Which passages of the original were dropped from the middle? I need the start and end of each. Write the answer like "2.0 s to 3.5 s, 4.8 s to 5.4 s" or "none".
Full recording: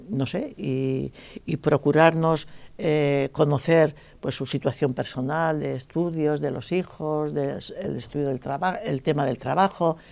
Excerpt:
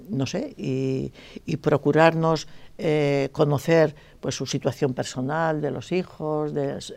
5.6 s to 6.4 s